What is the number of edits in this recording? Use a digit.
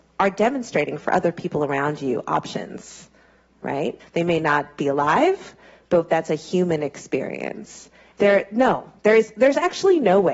2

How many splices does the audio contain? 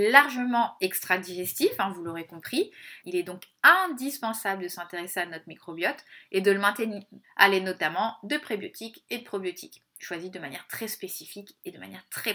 2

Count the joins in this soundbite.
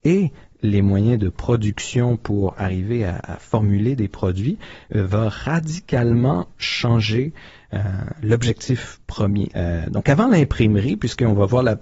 1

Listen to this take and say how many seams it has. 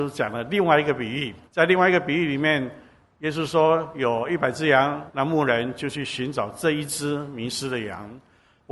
2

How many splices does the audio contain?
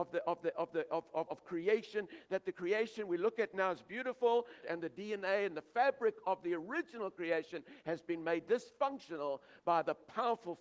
2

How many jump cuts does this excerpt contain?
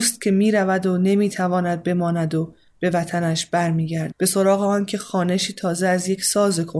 1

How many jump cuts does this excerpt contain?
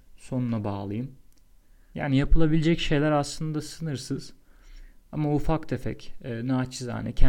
1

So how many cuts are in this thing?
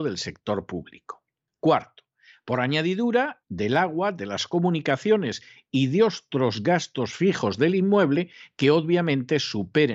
2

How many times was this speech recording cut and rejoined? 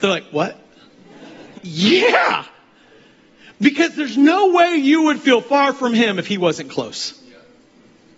1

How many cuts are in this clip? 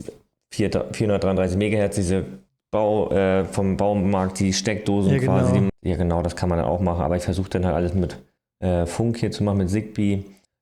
1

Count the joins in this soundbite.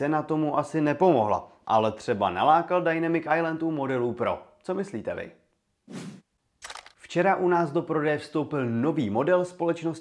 0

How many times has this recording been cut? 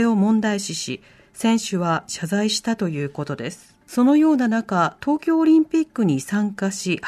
1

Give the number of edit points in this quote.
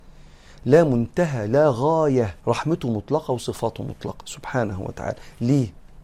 1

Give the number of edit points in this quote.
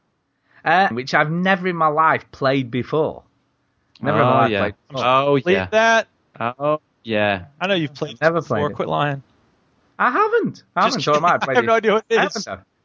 1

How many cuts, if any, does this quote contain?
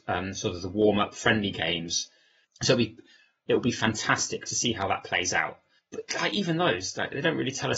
2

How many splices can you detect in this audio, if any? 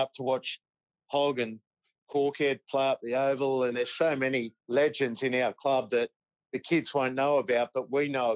1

